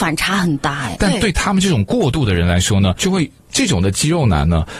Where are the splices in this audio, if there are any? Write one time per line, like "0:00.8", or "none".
0:00.9
0:03.0